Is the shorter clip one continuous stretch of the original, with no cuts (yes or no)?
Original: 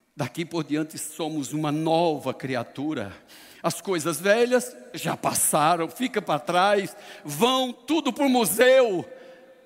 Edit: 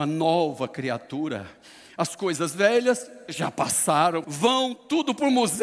no